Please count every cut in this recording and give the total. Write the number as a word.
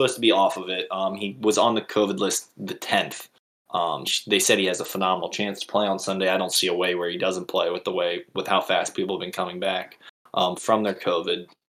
one